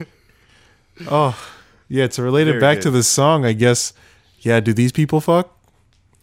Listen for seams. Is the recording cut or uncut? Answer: uncut